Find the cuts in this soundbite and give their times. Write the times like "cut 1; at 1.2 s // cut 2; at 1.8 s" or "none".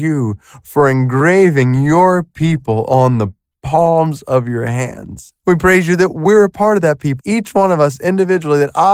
cut 1; at 5.4 s // cut 2; at 7.2 s